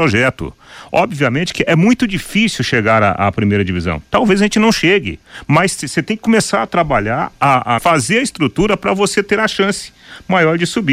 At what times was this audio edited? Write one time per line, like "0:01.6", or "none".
0:07.8

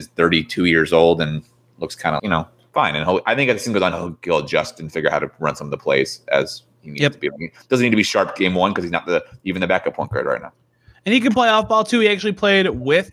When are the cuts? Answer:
0:02.2

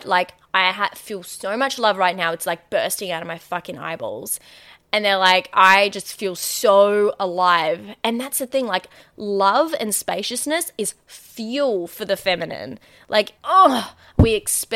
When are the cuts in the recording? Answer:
0:13.4

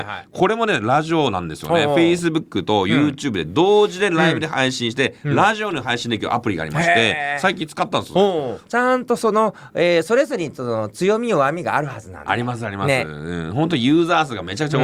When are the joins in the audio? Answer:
0:08.7

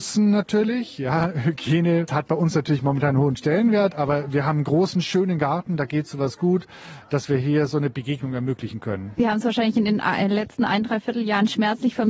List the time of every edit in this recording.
none

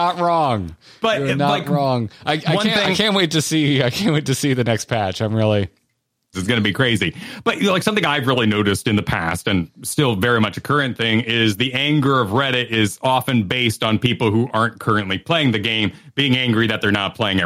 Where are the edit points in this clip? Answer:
0:06.3

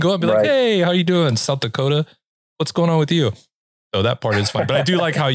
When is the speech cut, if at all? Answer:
none

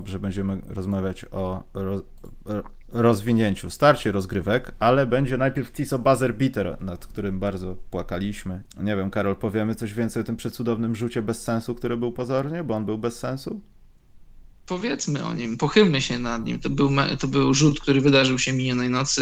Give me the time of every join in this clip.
0:08.7

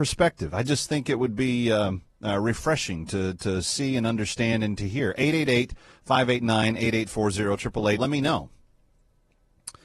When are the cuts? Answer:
0:08.0

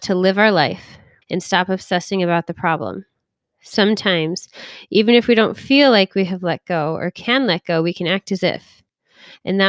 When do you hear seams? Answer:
0:01.2

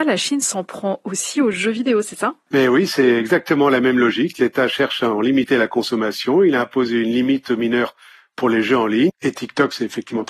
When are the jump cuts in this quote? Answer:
0:09.1

